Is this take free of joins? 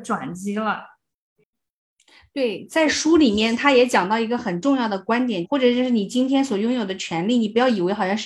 no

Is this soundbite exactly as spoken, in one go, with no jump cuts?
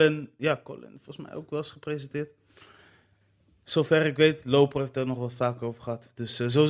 yes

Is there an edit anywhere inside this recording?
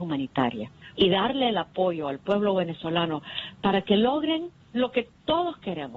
yes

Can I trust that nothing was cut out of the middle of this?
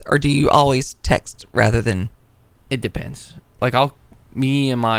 no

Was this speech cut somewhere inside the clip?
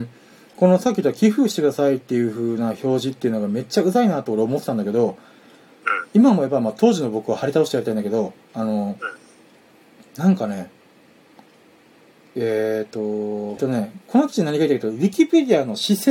yes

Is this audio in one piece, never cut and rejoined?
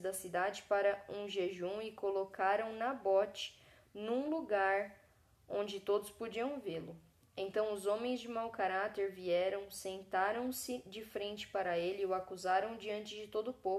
yes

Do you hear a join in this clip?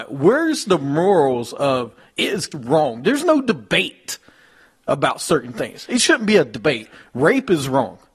yes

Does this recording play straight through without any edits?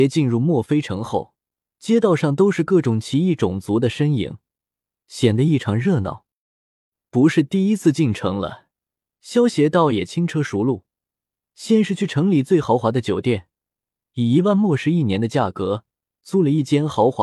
no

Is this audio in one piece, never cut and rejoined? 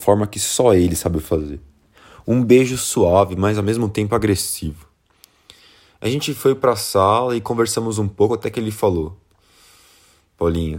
yes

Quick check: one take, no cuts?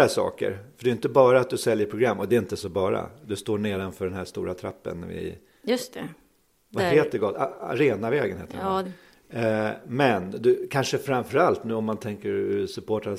no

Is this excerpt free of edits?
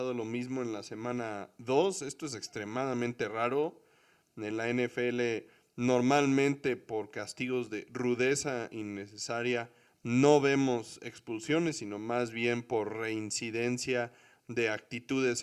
yes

